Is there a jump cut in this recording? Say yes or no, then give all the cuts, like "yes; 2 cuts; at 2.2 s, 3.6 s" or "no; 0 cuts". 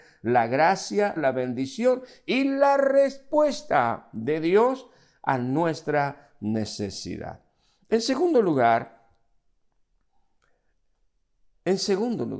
yes; 1 cut; at 1.2 s